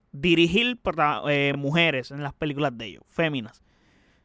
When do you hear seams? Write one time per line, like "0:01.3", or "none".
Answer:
none

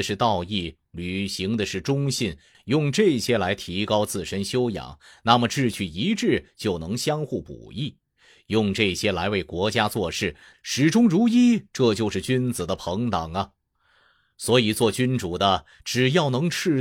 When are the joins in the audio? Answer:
0:02.5
0:10.5

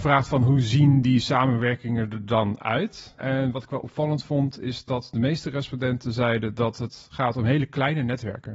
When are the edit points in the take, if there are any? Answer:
0:03.2

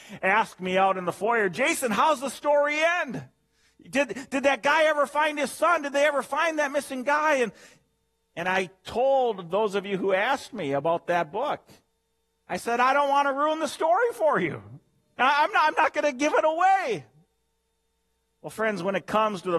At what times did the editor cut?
none

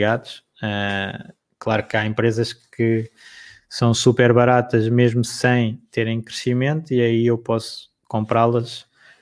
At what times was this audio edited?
none

